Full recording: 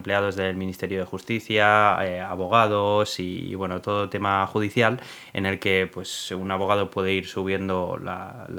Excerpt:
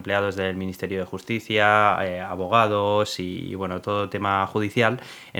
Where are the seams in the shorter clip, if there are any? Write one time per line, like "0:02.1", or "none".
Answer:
none